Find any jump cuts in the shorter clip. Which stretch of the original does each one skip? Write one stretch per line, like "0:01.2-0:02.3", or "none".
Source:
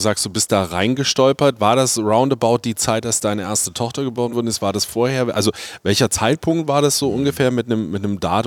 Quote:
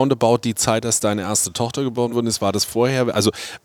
none

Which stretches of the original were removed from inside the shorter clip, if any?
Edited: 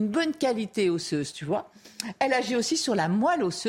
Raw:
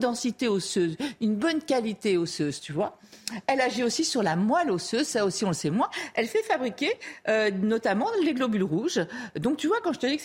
none

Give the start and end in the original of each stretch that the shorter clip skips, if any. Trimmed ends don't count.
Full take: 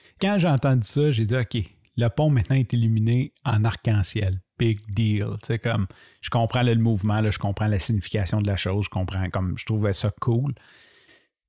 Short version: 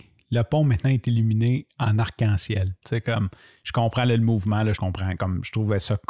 0:04.5-0:05.4
0:07.3-0:08.9

